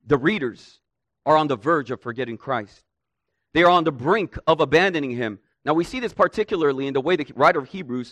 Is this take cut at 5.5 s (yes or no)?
yes